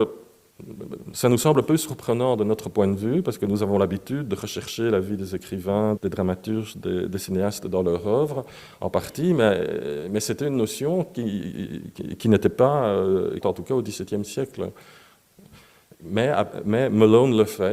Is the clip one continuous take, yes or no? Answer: no